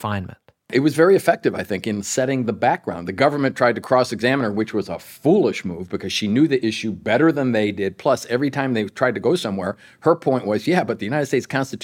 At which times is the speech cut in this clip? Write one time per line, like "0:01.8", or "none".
none